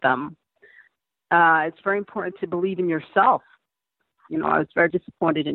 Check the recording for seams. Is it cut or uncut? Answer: cut